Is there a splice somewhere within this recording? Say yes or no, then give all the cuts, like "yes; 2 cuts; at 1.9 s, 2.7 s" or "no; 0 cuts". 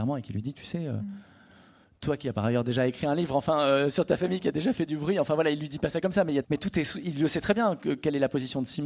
yes; 1 cut; at 6.4 s